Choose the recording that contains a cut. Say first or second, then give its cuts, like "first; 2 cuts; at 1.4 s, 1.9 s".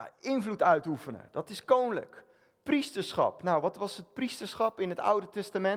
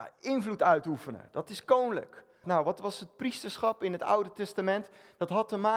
second; 1 cut; at 2.4 s